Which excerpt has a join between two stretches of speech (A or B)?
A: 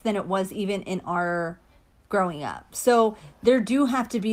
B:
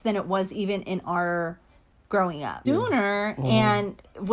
B